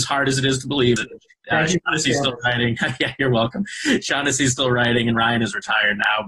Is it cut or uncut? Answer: cut